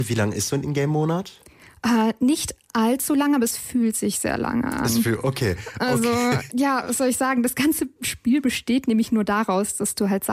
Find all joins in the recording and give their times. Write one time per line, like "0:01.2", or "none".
0:06.5